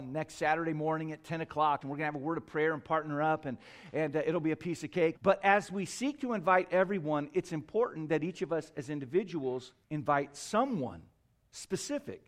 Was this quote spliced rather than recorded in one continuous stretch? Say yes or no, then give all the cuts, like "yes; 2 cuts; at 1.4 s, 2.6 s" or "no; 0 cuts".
yes; 3 cuts; at 1.8 s, 5.1 s, 9.8 s